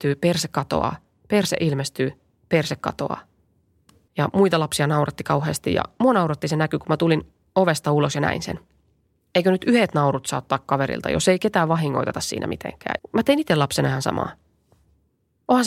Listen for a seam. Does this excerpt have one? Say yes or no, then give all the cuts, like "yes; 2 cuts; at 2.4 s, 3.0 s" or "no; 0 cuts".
yes; 3 cuts; at 4.1 s, 9.3 s, 13.0 s